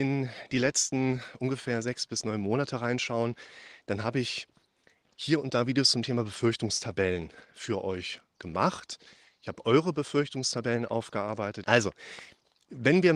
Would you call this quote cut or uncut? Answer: cut